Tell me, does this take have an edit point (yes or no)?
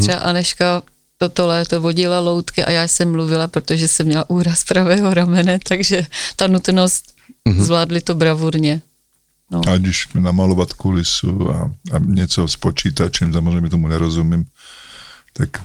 no